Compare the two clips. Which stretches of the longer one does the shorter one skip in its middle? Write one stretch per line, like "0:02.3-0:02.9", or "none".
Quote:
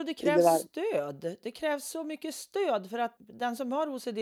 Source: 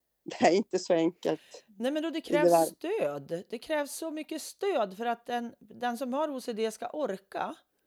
0:05.2-0:05.6